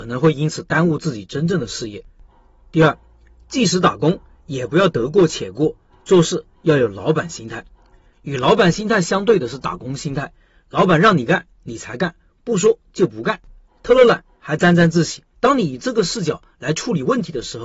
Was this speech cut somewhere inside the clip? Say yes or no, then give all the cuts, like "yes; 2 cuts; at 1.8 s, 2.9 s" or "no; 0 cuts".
yes; 1 cut; at 15.3 s